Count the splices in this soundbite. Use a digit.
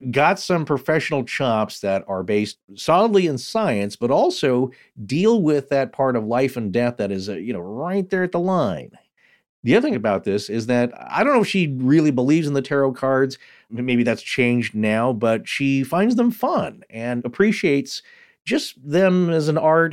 1